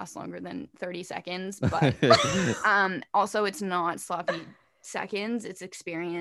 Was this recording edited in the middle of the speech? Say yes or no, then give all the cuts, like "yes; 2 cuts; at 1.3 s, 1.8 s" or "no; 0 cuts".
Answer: no; 0 cuts